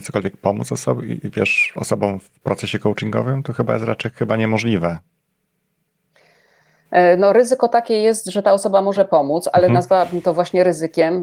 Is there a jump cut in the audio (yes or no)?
no